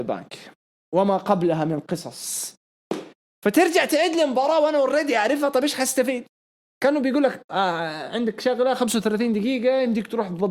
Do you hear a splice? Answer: no; 0 cuts

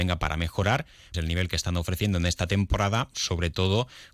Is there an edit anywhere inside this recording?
yes; 1 cut; at 1.1 s

